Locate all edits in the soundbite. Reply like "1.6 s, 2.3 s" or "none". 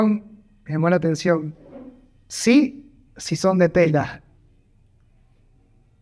none